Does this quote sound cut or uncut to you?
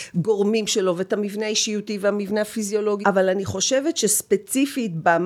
cut